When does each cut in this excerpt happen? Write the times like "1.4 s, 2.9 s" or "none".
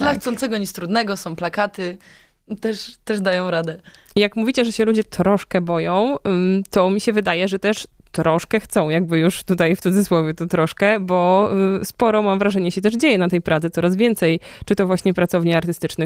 none